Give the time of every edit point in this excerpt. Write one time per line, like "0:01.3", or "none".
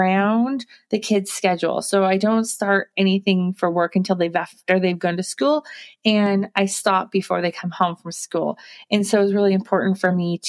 none

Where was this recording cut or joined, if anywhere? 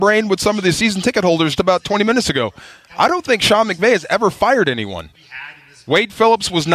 0:01.6

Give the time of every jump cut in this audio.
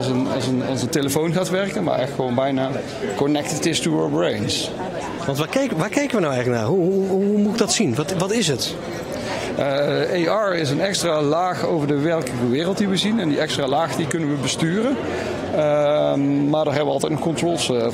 none

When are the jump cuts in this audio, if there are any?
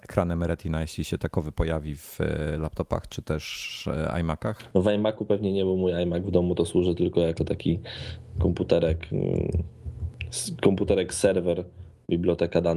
0:04.7

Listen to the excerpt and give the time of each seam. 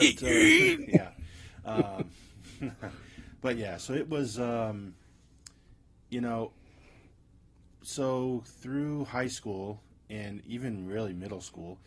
none

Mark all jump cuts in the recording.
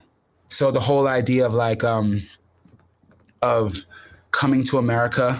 0:04.3

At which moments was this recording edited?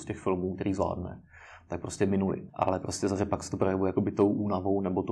0:02.5

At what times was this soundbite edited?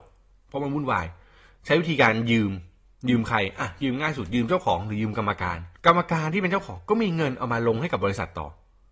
0:05.8

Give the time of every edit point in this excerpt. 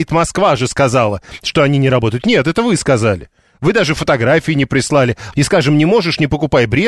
0:05.3

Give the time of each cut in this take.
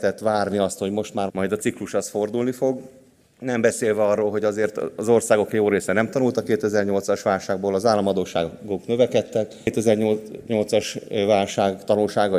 0:01.3

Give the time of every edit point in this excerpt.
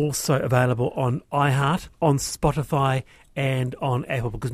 0:01.9

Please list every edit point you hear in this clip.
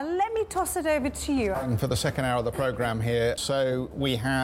0:01.5
0:03.4

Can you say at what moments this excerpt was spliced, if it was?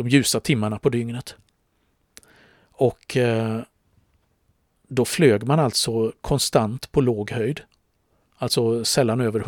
none

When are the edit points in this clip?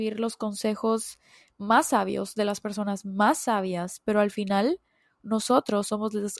none

